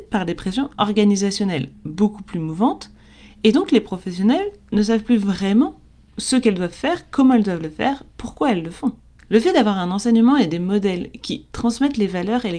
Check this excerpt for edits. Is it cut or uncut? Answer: uncut